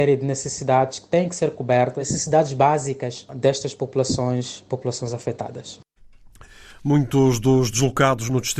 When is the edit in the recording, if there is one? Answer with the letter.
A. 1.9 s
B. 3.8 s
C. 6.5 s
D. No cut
D